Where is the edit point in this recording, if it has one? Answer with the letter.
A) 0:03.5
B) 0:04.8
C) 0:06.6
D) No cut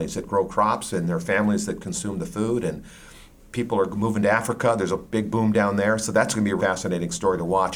C